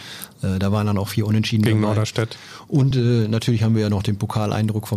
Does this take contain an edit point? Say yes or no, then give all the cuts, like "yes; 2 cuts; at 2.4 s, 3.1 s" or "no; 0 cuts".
no; 0 cuts